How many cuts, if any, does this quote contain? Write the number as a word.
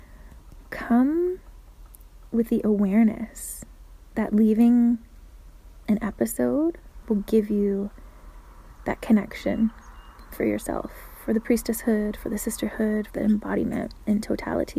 two